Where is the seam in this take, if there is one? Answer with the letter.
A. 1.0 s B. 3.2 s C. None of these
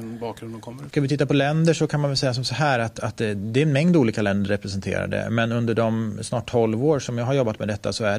C